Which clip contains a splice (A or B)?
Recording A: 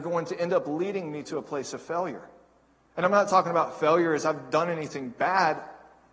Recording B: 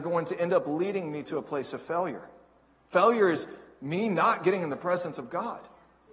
B